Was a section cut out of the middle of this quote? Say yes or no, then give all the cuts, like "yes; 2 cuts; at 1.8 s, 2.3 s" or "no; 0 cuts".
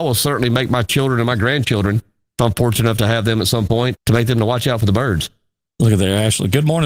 yes; 1 cut; at 4.0 s